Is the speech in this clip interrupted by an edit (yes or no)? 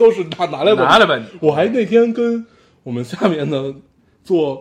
no